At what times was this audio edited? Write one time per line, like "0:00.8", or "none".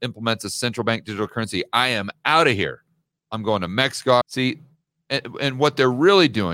0:04.2